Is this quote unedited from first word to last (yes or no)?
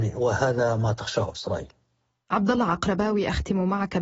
yes